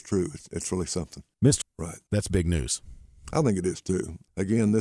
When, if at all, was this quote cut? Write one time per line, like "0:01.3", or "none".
0:01.6